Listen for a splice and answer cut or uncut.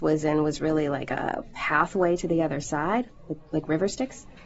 uncut